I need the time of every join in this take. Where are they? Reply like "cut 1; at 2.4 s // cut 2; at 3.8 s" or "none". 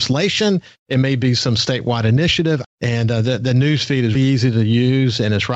cut 1; at 2.6 s // cut 2; at 4.1 s